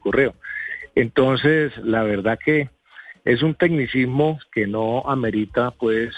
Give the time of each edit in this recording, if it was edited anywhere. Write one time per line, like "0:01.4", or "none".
none